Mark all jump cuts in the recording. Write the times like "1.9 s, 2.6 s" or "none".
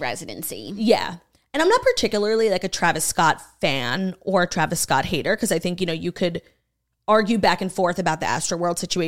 none